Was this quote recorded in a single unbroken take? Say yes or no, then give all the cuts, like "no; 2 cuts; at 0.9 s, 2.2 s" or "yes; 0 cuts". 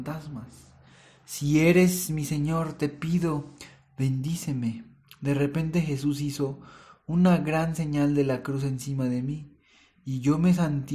yes; 0 cuts